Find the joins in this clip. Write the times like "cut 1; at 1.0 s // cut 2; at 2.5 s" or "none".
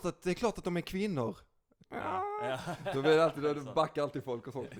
cut 1; at 1.8 s